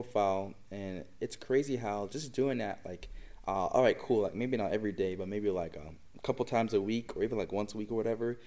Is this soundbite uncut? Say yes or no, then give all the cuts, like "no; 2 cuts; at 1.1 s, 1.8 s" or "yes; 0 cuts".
yes; 0 cuts